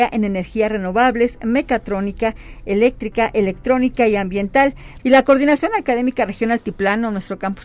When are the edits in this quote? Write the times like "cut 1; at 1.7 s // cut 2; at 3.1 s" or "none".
cut 1; at 5.0 s